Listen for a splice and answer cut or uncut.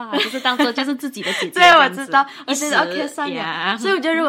uncut